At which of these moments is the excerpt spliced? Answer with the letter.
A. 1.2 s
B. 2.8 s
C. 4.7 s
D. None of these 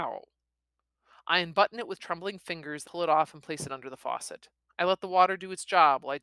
B